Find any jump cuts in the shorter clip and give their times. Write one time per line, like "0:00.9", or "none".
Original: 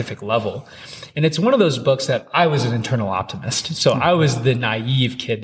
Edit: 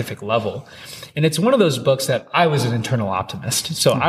none